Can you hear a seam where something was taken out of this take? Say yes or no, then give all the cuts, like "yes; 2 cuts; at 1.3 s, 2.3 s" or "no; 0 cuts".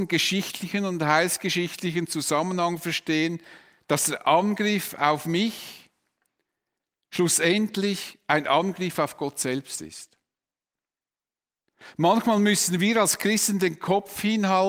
no; 0 cuts